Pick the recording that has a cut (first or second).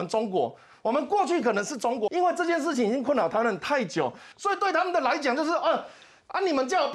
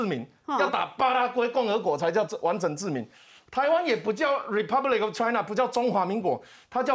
first